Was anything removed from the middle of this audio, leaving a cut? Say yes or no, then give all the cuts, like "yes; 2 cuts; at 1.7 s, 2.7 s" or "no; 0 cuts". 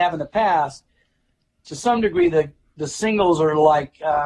no; 0 cuts